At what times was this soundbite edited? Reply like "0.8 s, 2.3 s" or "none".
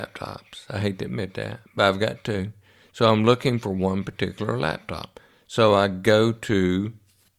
none